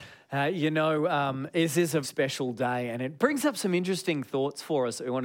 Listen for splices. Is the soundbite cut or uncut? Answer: cut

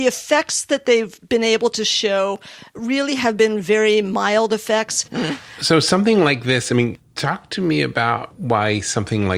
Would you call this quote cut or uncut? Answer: cut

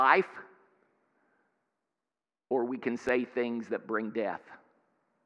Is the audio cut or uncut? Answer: uncut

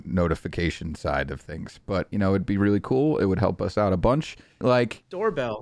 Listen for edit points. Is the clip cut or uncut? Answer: cut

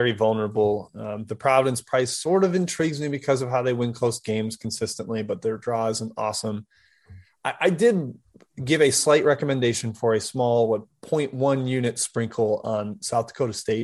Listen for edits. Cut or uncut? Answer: uncut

